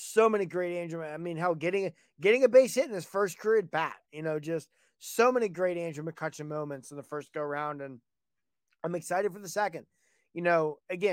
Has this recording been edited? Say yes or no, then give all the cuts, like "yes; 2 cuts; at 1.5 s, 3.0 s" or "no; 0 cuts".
no; 0 cuts